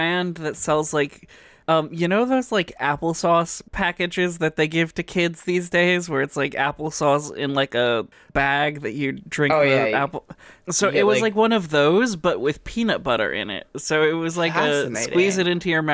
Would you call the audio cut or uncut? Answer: uncut